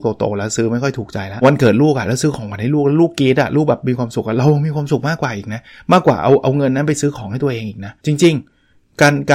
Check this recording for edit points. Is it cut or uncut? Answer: cut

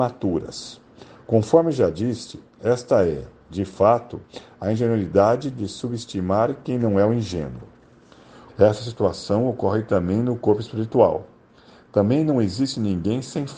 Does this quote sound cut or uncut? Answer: cut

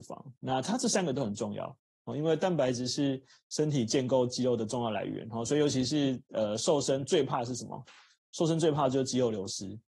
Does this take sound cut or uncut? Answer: uncut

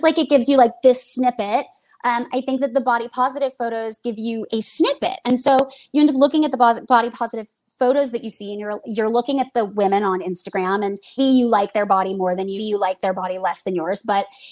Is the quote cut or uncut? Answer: cut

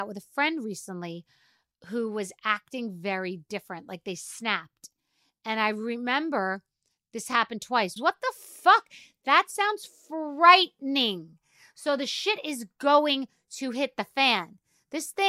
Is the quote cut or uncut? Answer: cut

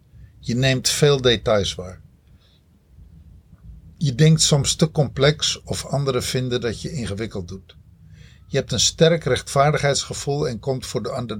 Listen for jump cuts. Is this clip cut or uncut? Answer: uncut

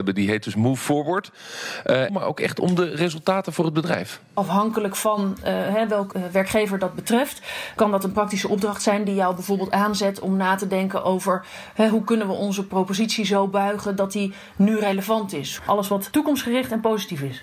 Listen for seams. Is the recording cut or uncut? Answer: cut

